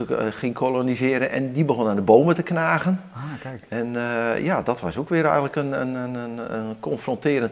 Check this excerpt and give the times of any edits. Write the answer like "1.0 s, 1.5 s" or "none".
none